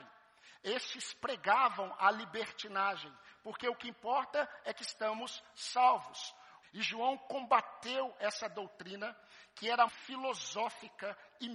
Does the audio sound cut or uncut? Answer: cut